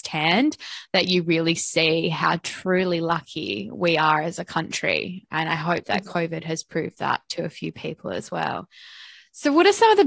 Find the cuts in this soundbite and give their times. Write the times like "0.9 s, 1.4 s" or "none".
none